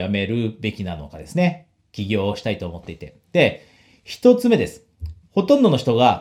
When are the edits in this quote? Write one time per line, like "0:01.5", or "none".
0:05.2